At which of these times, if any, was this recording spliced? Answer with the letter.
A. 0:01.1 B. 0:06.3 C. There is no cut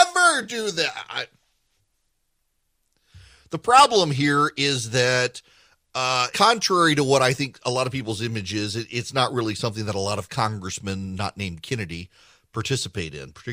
B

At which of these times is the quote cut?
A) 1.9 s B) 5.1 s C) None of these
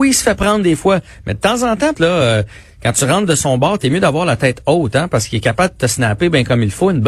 A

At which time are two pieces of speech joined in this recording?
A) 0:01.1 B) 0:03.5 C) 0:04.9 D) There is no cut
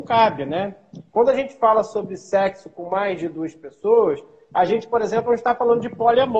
A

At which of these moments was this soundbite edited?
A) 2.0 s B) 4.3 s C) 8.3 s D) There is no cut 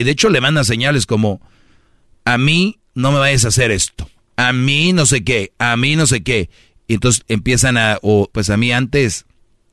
C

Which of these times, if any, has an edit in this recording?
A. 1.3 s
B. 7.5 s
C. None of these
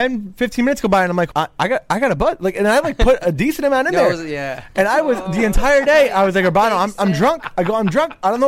A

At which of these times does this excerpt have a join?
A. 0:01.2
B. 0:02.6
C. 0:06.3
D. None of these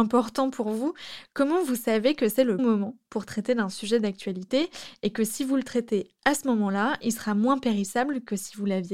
B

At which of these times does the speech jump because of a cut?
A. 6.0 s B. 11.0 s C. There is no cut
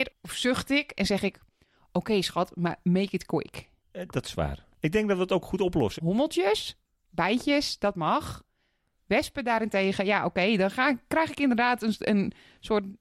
A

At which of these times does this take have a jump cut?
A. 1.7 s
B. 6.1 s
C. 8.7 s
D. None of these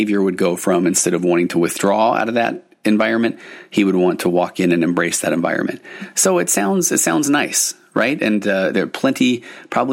C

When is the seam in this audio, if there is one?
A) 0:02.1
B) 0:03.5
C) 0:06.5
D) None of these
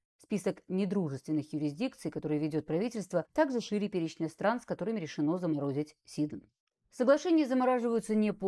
D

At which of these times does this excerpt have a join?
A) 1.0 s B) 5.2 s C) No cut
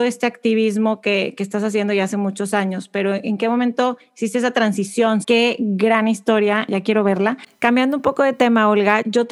B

